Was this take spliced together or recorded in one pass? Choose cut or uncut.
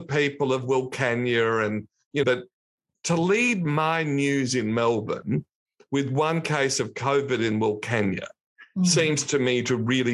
cut